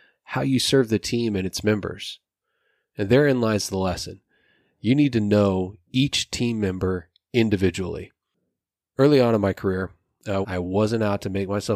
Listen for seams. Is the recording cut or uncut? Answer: cut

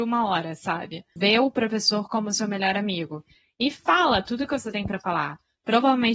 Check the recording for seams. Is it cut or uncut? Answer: cut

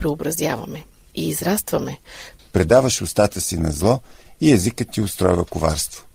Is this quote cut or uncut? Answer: cut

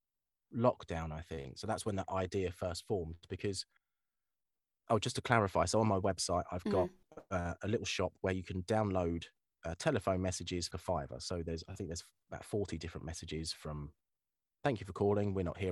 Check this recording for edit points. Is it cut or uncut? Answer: cut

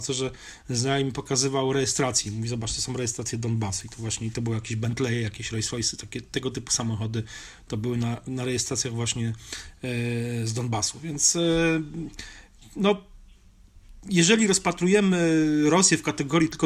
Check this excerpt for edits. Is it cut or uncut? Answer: uncut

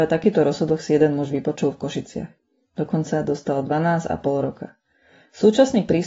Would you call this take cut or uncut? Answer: uncut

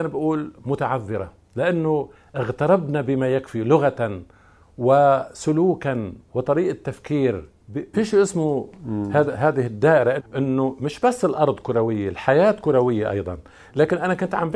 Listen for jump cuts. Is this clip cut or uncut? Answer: cut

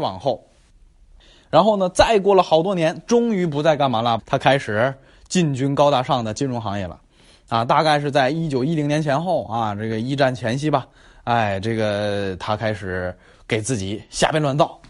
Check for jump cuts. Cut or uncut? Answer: cut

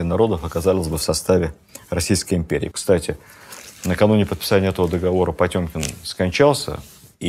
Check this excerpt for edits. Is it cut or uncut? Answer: cut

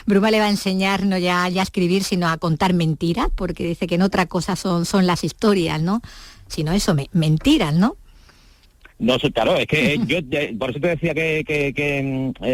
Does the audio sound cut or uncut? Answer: uncut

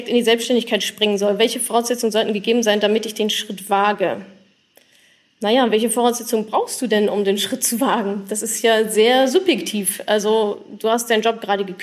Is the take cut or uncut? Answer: uncut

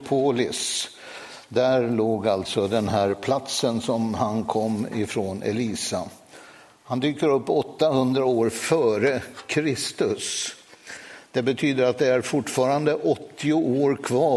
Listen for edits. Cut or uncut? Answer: uncut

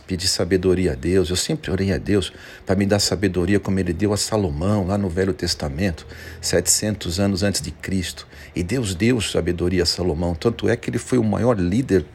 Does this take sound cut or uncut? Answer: uncut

